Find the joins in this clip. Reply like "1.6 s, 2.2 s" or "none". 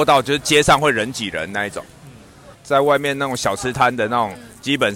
2.5 s